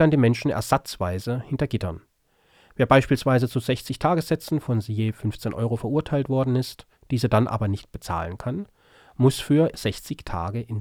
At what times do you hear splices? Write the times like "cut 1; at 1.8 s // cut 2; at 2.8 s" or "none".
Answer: cut 1; at 6.9 s // cut 2; at 9.7 s